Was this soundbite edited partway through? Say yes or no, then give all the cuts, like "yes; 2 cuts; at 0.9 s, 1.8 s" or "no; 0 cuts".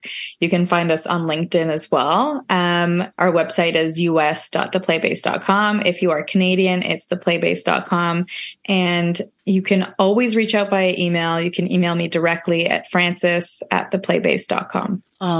yes; 1 cut; at 3.1 s